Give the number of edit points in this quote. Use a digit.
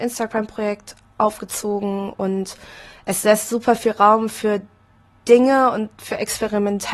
0